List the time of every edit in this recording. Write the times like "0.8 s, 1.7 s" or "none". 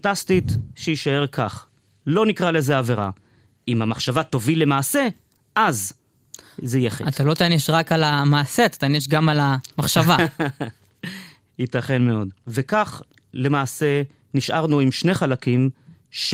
none